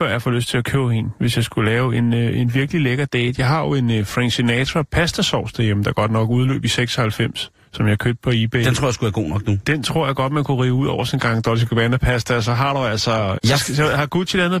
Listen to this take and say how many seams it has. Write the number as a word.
one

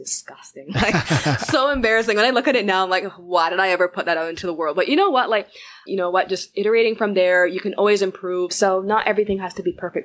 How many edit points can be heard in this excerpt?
two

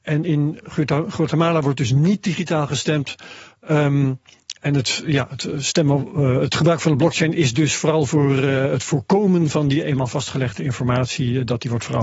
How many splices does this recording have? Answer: zero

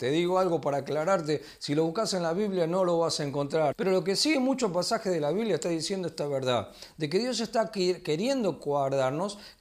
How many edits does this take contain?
one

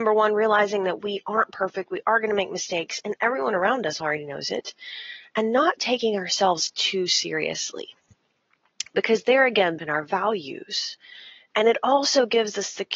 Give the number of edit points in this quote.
one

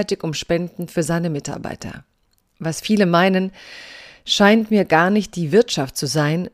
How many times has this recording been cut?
zero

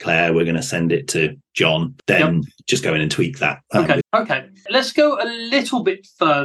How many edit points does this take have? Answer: one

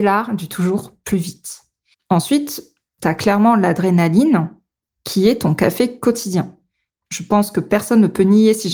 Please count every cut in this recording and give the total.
two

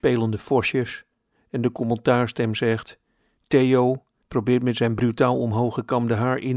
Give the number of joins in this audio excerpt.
one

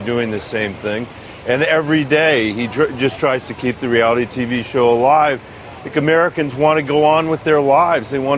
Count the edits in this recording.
zero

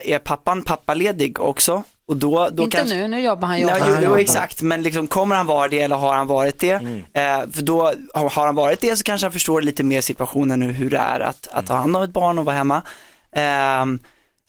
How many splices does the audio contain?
zero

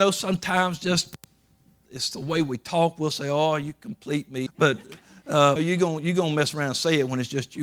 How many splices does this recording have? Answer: two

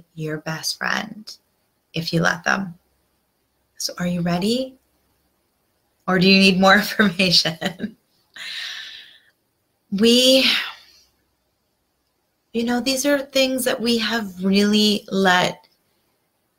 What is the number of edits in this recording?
zero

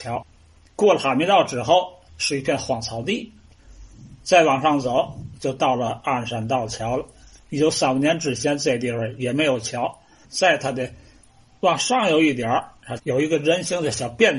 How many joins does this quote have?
two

